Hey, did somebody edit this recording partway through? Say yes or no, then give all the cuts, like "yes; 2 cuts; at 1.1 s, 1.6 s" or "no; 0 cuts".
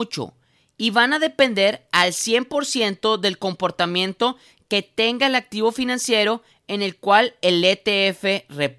no; 0 cuts